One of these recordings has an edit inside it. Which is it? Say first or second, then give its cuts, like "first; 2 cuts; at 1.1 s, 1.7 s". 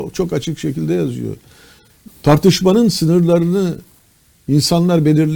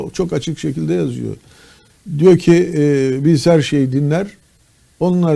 first; 1 cut; at 2.1 s